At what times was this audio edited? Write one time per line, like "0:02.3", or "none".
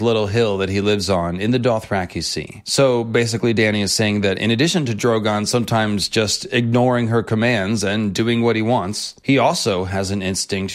none